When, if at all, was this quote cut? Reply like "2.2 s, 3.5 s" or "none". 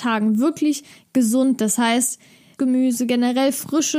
2.6 s